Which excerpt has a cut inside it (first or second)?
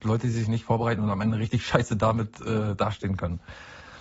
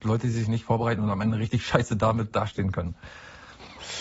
second